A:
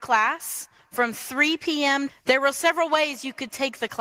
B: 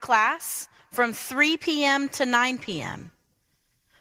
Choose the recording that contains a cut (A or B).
A